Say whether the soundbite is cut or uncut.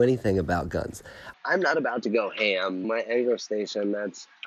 cut